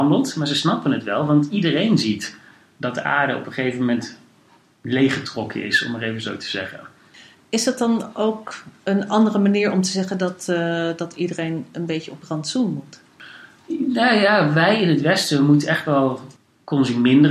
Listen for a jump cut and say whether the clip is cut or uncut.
uncut